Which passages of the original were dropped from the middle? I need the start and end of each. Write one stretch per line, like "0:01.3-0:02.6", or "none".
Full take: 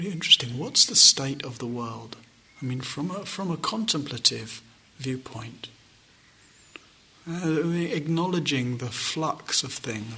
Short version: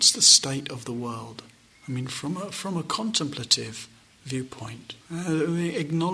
0:05.7-0:07.2